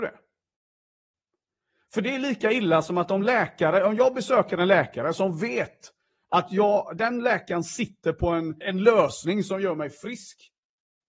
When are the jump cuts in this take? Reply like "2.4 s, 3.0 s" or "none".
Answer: 7.0 s, 8.6 s